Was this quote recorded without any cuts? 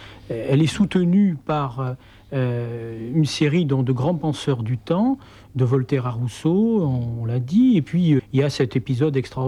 no; 1 cut; at 8.2 s

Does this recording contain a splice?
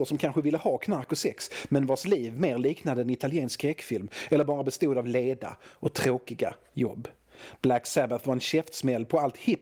no; 0 cuts

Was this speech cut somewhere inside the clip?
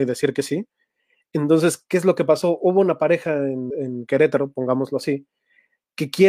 yes; 1 cut; at 3.7 s

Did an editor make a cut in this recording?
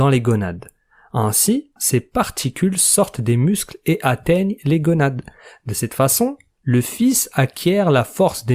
yes; 1 cut; at 1.8 s

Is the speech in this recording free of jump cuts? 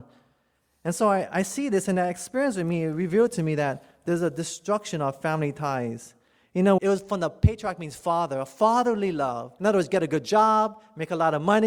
no; 2 cuts; at 6.8 s, 9.6 s

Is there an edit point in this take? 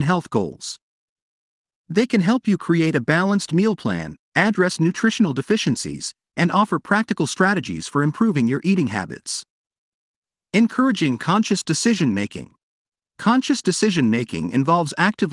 no; 0 cuts

